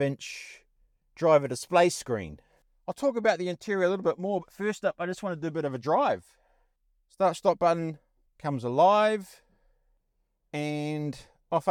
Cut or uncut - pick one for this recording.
cut